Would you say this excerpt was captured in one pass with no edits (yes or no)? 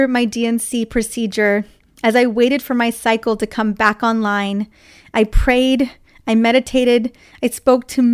yes